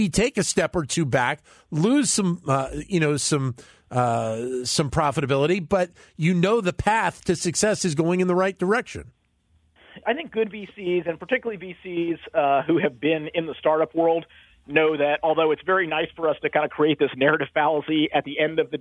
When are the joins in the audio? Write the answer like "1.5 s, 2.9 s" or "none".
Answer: 10.0 s